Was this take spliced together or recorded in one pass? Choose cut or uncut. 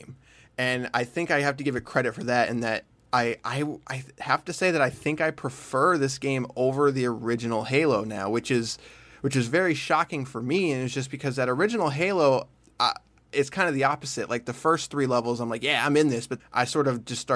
cut